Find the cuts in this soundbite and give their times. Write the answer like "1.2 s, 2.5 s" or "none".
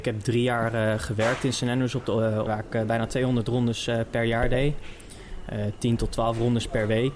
2.5 s